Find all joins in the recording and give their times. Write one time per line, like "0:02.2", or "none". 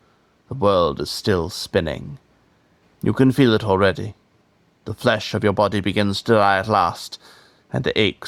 0:02.8

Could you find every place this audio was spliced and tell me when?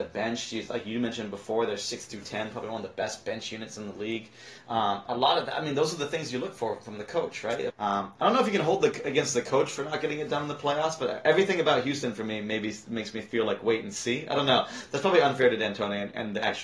0:07.7

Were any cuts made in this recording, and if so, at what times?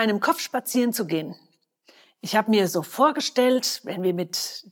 none

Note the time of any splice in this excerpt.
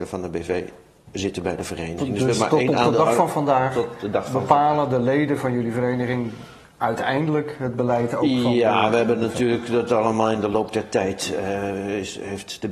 none

